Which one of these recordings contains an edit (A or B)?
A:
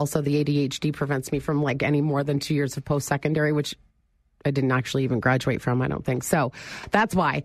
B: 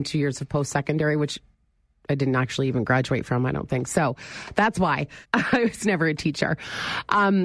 B